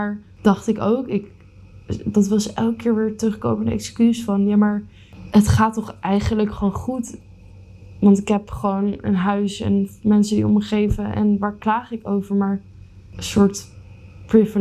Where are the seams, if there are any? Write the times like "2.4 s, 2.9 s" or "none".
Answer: none